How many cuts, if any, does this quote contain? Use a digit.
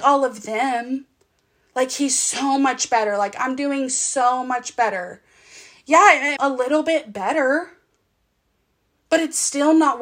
1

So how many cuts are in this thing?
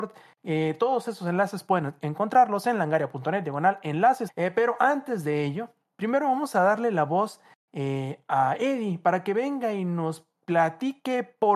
1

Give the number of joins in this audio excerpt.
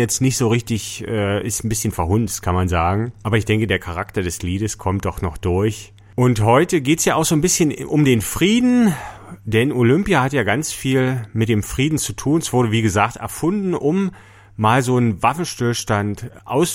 0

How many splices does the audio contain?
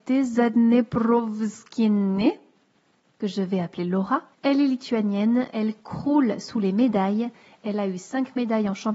2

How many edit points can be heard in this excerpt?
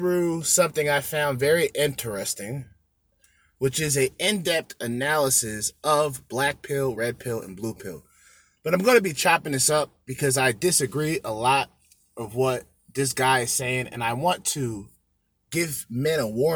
0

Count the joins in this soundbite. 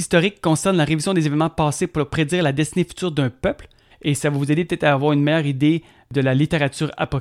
1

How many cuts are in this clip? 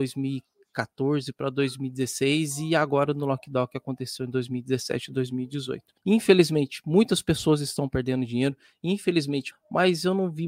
2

